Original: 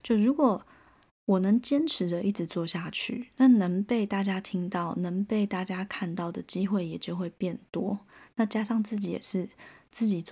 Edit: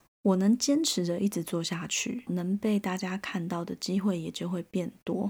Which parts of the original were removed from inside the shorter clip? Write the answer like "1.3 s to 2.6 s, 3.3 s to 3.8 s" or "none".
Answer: 3.3 s to 4.9 s

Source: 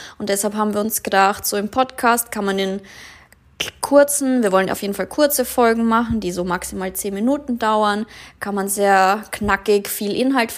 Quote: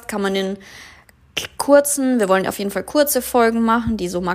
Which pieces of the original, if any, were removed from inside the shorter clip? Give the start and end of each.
none

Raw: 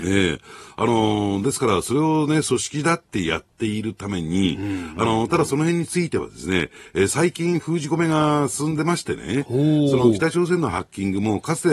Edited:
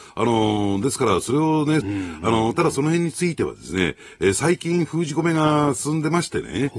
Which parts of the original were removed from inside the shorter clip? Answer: 2.4 s to 4.6 s

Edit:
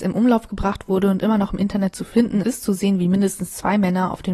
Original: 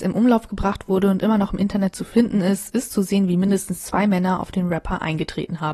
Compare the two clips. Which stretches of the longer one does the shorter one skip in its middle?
2.4 s to 2.7 s

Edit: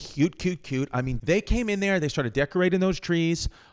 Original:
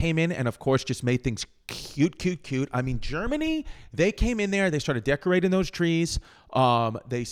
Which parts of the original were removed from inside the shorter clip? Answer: 3.0 s to 3.9 s

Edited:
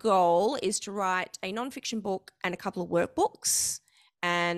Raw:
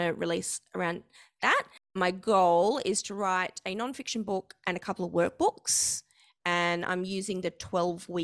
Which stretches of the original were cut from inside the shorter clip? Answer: none

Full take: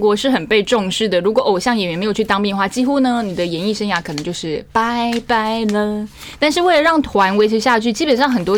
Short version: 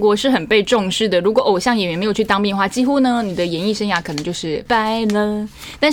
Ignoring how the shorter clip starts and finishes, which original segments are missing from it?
4.7 s to 5.2 s

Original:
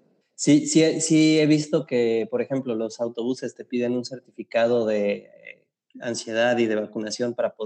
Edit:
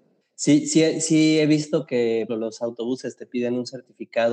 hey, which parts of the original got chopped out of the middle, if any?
2.3 s to 2.7 s

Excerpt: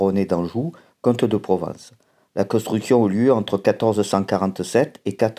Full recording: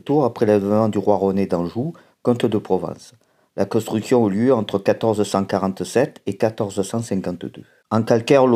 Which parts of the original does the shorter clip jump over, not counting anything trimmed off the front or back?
none

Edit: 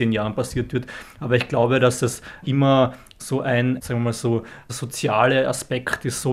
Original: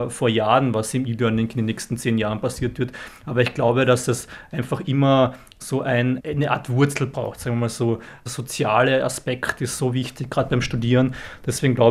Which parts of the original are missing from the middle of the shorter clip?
4.5 s to 4.8 s, 6.2 s to 7.4 s

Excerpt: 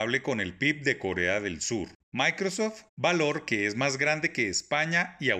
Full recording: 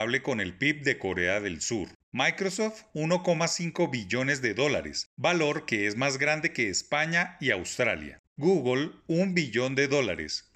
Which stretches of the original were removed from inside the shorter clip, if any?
2.9 s to 5.1 s

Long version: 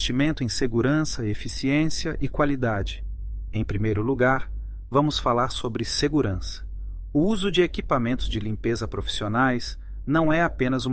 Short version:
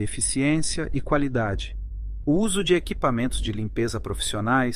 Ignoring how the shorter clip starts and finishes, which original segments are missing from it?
3.5 s to 7.1 s

